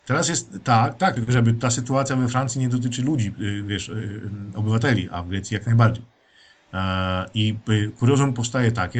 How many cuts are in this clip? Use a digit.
0